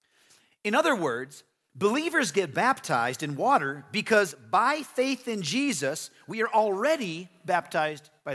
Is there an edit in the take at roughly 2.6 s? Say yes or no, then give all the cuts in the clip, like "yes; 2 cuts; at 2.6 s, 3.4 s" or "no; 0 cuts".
no; 0 cuts